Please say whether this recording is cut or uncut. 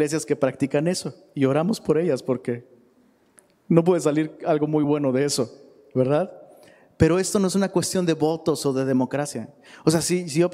uncut